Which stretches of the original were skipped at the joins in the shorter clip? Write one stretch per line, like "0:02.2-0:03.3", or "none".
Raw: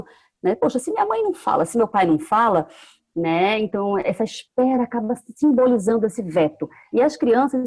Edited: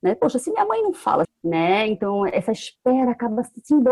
0:01.7-0:03.0